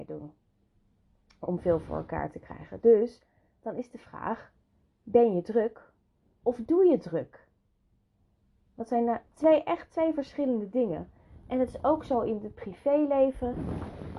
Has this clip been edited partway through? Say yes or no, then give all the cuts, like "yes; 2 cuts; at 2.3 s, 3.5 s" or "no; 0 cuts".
no; 0 cuts